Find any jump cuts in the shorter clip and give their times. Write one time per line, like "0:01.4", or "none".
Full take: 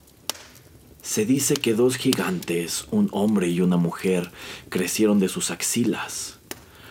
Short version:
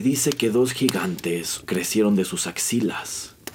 0:01.6